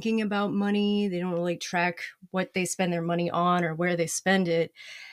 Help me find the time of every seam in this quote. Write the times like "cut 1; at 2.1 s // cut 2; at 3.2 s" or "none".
none